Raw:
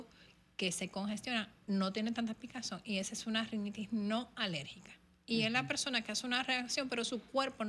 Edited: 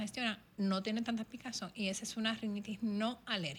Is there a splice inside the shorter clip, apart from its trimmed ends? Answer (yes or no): no